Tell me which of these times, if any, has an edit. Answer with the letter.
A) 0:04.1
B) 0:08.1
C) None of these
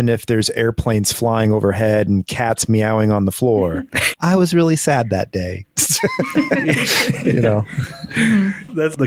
A